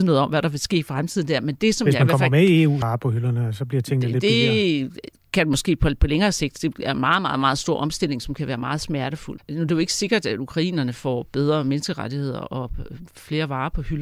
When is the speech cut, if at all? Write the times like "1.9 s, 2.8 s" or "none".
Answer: 2.8 s, 9.4 s